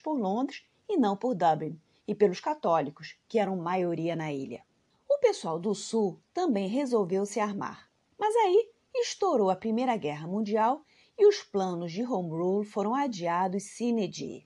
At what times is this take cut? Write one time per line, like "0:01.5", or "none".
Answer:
0:04.9